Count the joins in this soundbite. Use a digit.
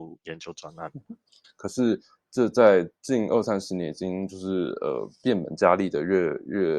2